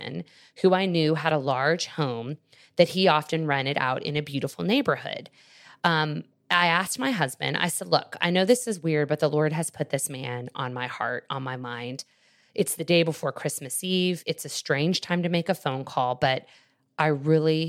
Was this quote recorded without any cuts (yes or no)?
yes